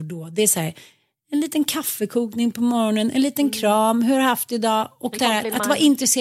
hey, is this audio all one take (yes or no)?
no